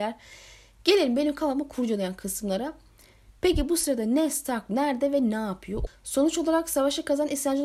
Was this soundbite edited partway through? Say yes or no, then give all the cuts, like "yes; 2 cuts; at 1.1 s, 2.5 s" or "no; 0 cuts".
yes; 2 cuts; at 3.4 s, 5.9 s